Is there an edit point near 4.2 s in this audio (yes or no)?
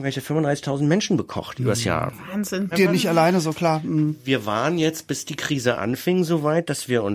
no